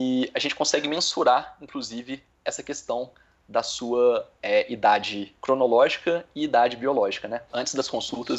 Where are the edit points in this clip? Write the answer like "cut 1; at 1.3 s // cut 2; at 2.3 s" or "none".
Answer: cut 1; at 7.5 s